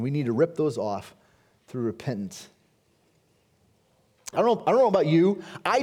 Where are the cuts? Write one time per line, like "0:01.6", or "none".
0:04.3